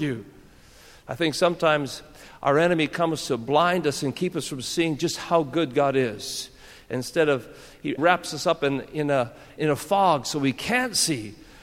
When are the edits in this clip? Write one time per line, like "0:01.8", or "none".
0:08.0
0:09.6